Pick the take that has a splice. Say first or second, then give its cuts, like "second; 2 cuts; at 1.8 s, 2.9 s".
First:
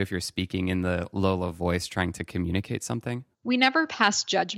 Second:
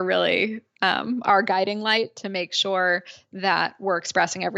first; 1 cut; at 3.3 s